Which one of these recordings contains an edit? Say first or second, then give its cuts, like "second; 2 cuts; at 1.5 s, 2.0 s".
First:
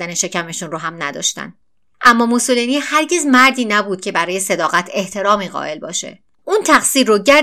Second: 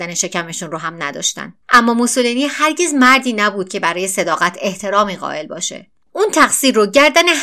second; 1 cut; at 1.6 s